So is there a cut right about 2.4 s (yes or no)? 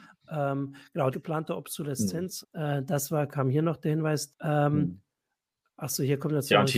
yes